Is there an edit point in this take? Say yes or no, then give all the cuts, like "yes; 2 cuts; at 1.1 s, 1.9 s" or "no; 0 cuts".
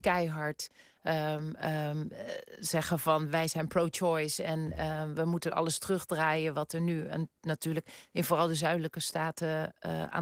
no; 0 cuts